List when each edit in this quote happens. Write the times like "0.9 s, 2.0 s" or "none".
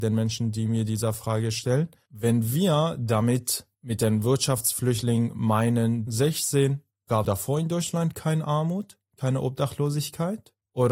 6.1 s, 7.2 s

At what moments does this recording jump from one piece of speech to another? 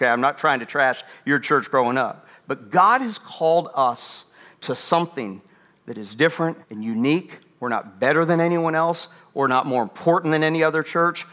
6.6 s

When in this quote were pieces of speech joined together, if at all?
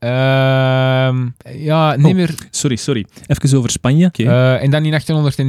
1.4 s, 4.1 s

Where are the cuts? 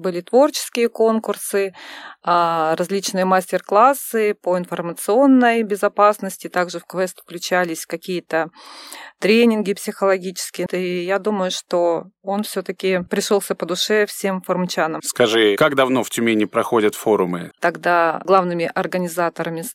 10.7 s, 17.5 s

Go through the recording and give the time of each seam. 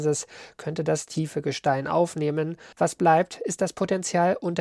2.7 s

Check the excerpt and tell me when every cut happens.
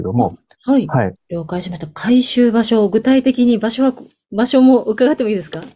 1.1 s

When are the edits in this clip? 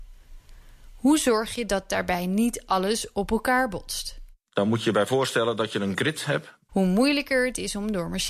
6.7 s

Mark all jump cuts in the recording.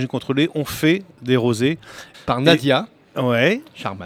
2.1 s

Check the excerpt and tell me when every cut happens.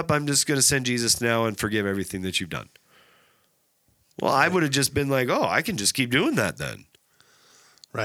none

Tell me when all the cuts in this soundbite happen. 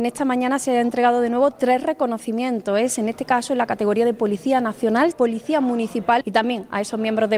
5.1 s, 6.2 s

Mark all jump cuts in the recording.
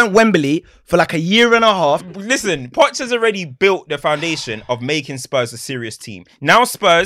2.0 s

